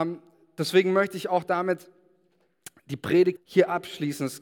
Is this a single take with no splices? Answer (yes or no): no